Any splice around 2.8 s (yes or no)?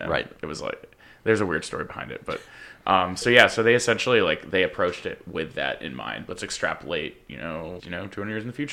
no